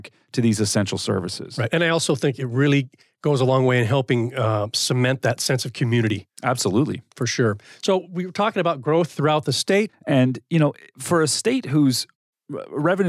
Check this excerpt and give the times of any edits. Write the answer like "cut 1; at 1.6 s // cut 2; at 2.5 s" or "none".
cut 1; at 9.9 s